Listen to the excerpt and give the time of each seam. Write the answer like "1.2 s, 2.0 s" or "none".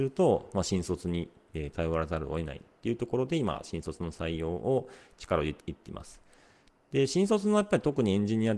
5.6 s